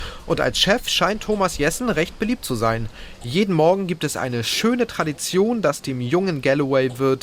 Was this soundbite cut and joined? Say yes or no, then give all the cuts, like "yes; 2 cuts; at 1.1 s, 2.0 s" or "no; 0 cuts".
no; 0 cuts